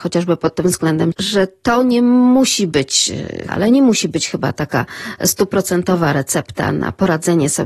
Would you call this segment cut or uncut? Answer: cut